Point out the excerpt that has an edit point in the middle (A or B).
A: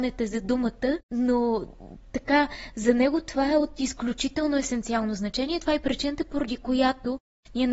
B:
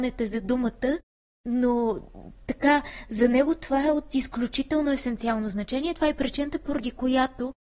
A